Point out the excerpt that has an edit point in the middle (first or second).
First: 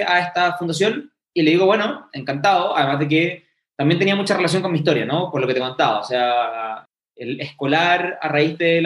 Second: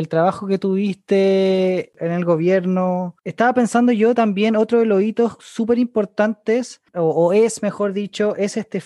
first